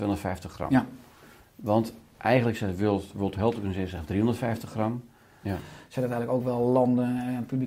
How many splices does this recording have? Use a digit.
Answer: 1